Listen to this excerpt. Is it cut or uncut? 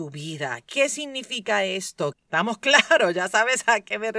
cut